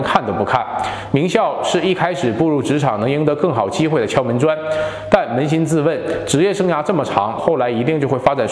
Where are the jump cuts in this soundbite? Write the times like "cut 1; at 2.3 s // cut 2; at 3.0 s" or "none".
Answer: cut 1; at 7.4 s